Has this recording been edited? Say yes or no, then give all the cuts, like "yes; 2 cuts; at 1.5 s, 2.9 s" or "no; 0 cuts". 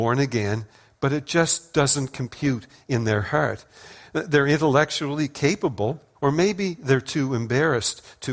yes; 1 cut; at 6.1 s